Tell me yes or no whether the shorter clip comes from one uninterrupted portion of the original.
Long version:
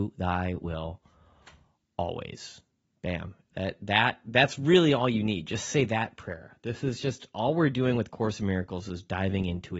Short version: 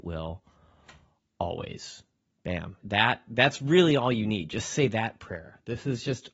no